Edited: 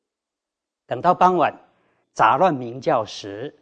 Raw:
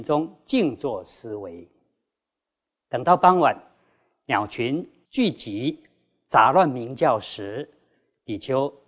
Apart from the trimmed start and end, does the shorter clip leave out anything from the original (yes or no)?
yes